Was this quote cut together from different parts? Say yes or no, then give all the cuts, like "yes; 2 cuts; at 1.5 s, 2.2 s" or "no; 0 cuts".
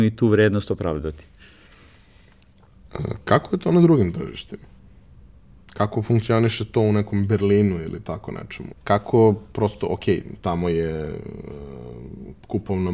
yes; 1 cut; at 8.7 s